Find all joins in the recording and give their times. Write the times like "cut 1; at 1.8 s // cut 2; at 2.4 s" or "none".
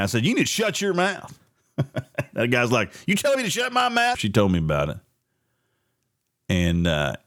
cut 1; at 4.1 s